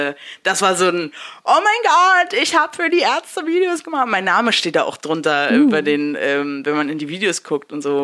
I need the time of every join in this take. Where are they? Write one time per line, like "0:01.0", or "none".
none